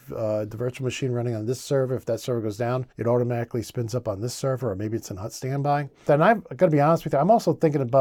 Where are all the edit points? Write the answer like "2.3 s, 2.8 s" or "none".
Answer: 2.9 s, 6.1 s